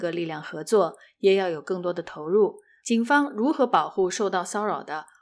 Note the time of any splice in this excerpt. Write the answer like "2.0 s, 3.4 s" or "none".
none

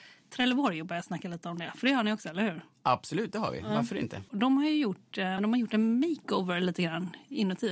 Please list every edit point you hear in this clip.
4.3 s, 5.4 s

